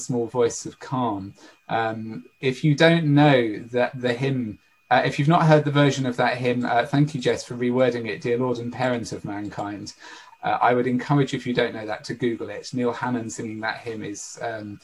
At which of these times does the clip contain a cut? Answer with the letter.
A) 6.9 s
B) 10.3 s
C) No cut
B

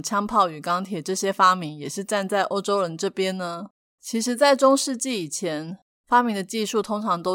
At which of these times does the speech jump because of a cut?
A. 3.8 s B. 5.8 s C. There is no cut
C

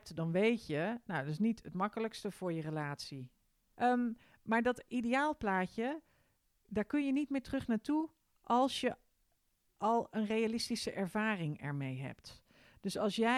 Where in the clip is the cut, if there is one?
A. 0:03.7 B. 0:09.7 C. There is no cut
A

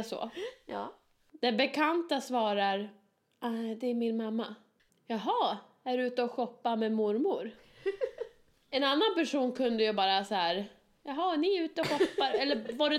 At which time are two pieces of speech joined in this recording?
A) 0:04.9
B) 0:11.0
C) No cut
A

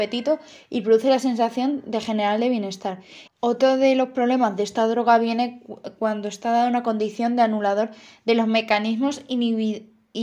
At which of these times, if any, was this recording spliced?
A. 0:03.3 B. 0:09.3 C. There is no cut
A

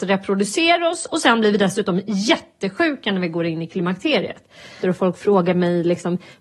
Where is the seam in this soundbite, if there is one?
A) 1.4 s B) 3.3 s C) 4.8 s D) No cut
C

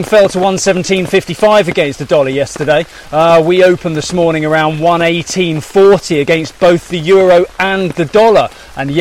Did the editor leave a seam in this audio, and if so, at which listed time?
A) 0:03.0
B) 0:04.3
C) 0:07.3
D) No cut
A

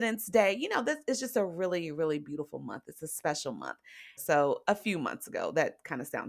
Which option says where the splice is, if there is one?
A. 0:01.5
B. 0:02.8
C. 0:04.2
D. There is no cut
C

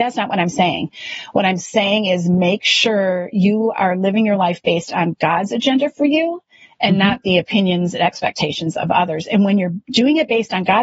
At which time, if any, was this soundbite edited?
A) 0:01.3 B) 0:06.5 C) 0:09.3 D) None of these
D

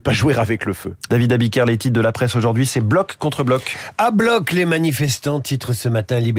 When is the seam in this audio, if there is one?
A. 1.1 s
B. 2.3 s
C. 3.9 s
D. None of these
A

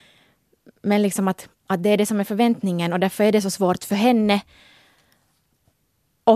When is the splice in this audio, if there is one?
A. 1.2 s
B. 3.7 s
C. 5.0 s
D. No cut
D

